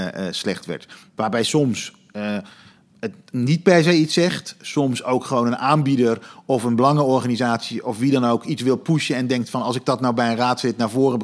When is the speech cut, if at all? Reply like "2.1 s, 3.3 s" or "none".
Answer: 1.0 s